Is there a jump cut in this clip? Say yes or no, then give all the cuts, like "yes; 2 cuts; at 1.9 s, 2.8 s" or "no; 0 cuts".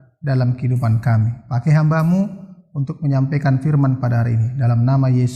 no; 0 cuts